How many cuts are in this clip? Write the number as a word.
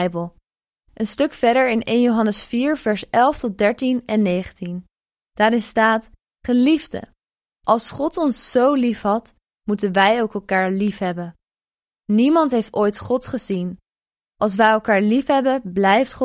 zero